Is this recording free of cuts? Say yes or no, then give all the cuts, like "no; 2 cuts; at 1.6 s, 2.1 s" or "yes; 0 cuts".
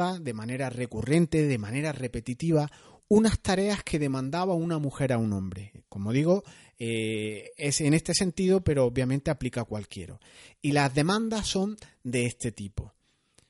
yes; 0 cuts